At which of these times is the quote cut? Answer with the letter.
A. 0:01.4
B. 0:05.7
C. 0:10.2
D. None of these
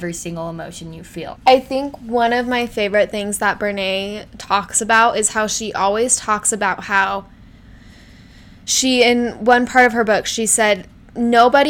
A